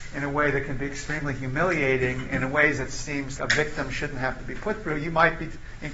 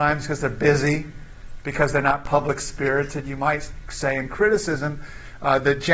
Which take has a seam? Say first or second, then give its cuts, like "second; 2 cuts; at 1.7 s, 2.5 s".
first; 1 cut; at 3.4 s